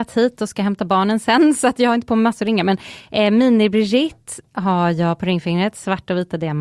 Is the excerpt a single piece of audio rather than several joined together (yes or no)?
yes